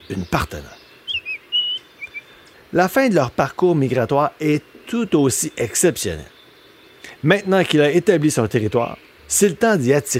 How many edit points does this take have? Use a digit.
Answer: 2